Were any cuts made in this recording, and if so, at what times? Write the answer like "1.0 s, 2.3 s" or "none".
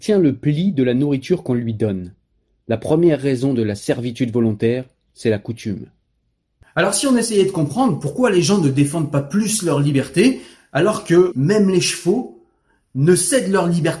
11.3 s